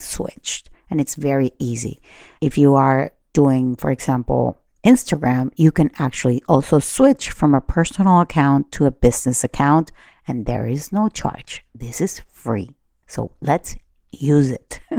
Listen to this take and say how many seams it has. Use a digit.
0